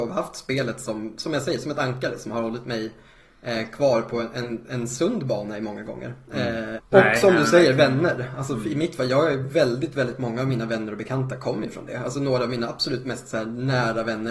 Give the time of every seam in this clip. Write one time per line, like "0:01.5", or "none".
0:06.8